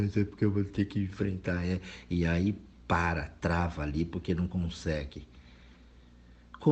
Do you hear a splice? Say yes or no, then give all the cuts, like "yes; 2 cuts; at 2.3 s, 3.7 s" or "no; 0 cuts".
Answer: no; 0 cuts